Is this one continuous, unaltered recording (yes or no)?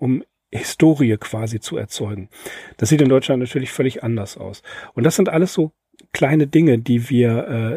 yes